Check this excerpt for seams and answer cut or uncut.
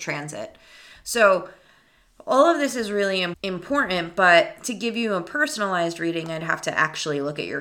uncut